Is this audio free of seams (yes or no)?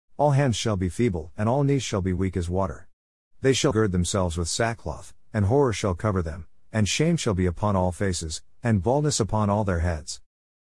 no